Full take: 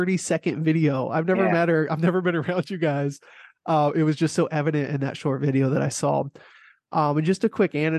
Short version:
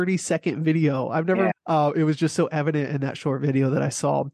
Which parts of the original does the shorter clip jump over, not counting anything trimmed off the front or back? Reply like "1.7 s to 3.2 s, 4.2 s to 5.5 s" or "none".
1.5 s to 3.5 s